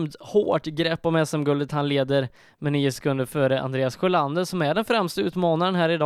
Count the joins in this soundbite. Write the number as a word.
zero